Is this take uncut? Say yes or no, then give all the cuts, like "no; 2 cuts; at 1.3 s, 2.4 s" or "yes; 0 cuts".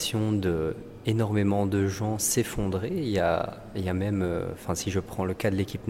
yes; 0 cuts